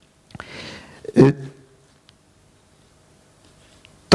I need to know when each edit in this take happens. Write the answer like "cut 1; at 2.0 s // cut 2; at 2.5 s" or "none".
none